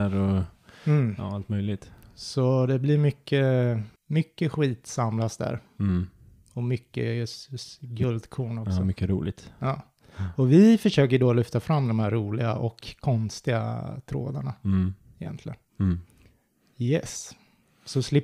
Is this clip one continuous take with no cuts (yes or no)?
no